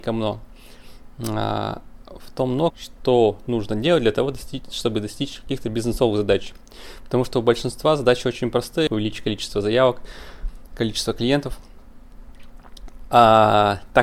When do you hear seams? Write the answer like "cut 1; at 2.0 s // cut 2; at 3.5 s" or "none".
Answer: cut 1; at 2.7 s // cut 2; at 8.9 s